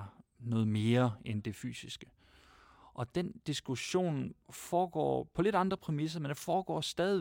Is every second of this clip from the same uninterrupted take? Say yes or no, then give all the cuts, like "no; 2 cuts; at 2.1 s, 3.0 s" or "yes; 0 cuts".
yes; 0 cuts